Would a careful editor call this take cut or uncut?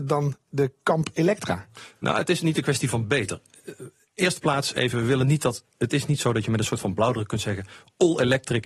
uncut